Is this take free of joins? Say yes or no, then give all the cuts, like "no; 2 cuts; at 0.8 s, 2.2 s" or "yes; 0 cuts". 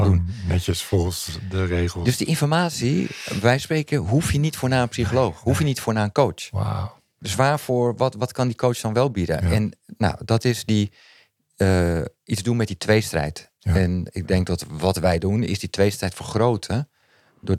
yes; 0 cuts